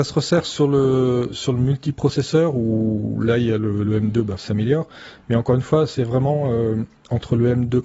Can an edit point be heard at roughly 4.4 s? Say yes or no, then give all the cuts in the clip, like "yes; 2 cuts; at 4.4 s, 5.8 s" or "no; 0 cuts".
yes; 1 cut; at 4.4 s